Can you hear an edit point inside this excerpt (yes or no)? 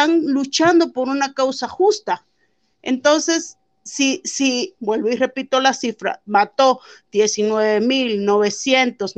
yes